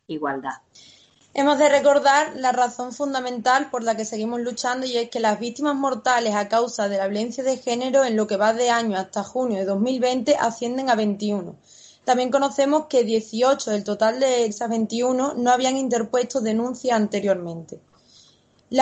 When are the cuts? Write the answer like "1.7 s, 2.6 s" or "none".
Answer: 14.5 s

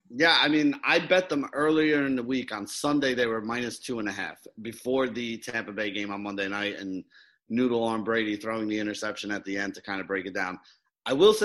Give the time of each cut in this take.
none

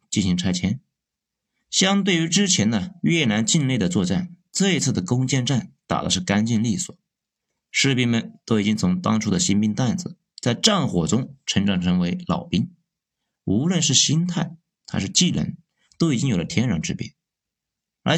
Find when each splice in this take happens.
none

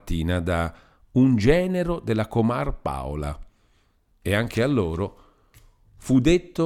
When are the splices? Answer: 4.1 s

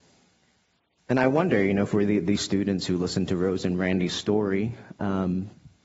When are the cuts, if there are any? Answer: none

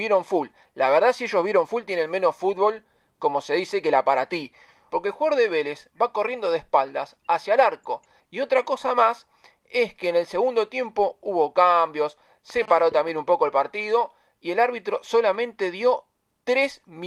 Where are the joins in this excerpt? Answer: 4.9 s, 8.2 s

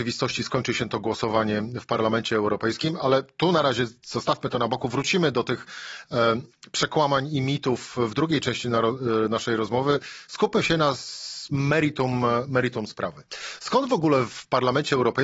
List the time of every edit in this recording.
none

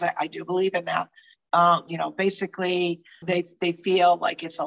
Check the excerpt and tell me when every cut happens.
1.9 s, 3.2 s

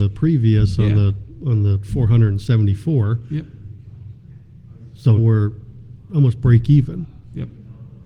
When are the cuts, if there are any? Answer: 5.2 s

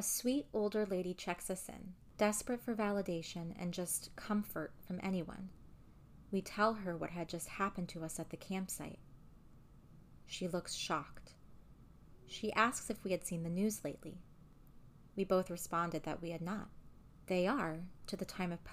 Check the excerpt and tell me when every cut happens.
17.3 s

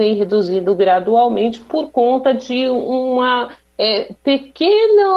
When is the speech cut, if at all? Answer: none

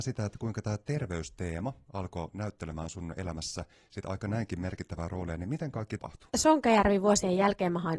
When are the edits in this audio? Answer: 6.0 s

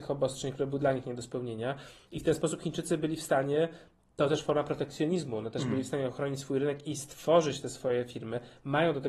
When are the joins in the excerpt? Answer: none

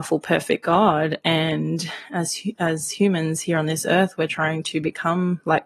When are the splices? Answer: none

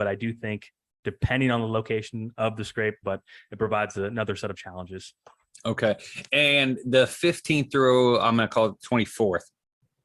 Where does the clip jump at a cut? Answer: 3.0 s

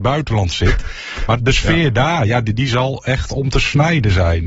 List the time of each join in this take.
1.4 s

